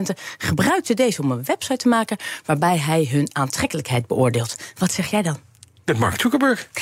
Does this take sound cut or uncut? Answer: uncut